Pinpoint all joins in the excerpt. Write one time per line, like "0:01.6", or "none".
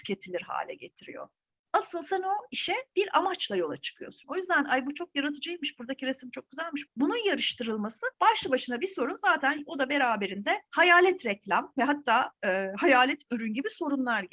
0:04.2
0:06.9
0:08.1